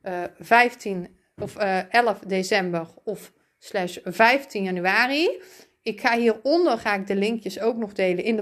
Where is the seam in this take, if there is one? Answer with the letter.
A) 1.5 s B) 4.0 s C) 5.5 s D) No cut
D